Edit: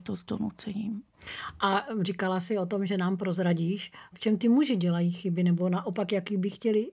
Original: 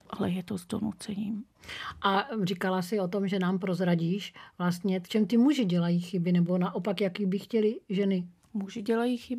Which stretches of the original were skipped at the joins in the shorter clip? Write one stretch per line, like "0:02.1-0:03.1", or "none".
0:04.5-0:05.0